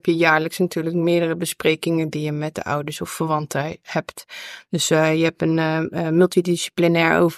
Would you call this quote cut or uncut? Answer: uncut